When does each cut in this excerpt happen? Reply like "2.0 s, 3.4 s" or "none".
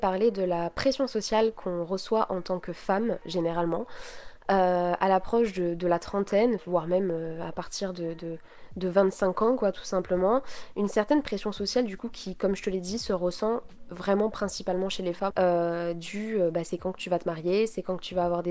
15.3 s